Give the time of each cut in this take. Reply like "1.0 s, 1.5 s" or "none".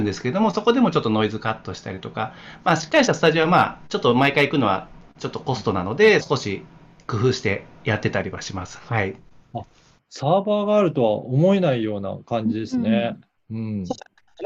6.2 s